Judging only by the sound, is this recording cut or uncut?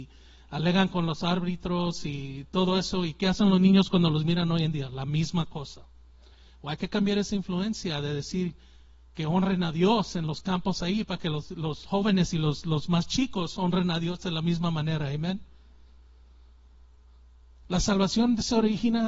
uncut